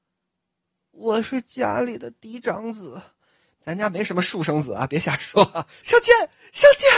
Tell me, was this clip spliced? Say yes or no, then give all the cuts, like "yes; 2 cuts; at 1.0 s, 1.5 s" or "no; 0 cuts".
yes; 1 cut; at 5.8 s